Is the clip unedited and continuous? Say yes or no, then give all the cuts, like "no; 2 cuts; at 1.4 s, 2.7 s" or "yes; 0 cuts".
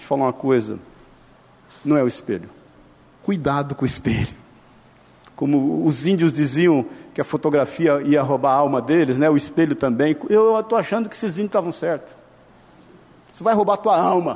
no; 1 cut; at 3.2 s